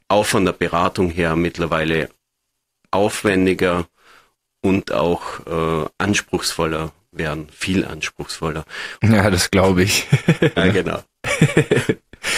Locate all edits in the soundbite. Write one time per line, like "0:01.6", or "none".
0:09.0
0:10.6